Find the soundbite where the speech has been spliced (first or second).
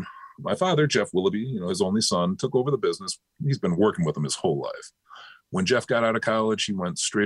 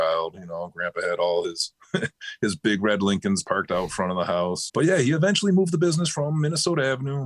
second